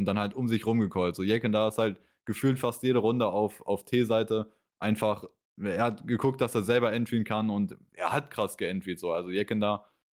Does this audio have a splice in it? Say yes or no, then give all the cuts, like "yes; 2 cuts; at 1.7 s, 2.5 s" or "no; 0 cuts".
no; 0 cuts